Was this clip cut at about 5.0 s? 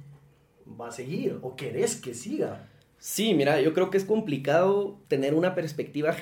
yes; 1 cut; at 5.0 s

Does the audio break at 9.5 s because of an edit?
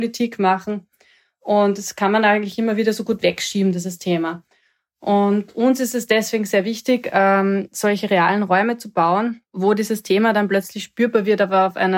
yes; 1 cut; at 9.5 s

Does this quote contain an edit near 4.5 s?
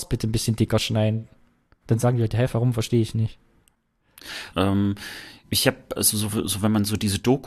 yes; 2 cuts; at 4.5 s, 5.9 s

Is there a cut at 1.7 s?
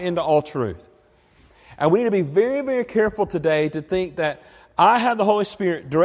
no; 0 cuts

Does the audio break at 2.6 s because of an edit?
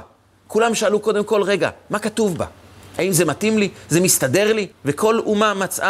no; 1 cut; at 4.7 s

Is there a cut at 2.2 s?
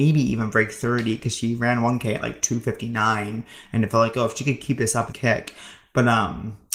no; 1 cut; at 5.1 s

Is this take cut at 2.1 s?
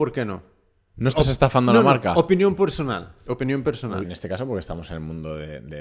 no; 1 cut; at 4.0 s

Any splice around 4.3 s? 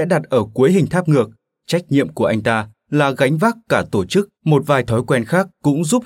yes; 1 cut; at 4.3 s

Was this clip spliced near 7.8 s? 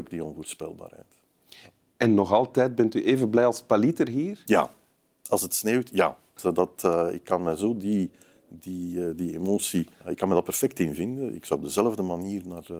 no; 2 cuts; at 6.4 s, 9.9 s

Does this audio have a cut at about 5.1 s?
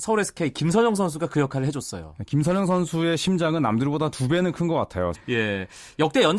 yes; 1 cut; at 5.1 s

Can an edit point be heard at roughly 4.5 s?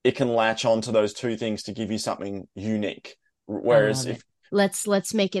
yes; 1 cut; at 4.5 s

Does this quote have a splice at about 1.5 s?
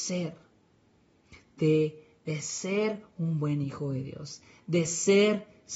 no; 0 cuts

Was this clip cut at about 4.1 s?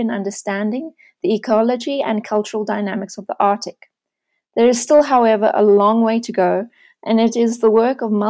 no; 0 cuts

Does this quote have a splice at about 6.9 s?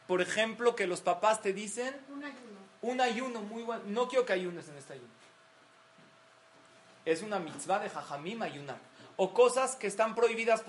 no; 0 cuts

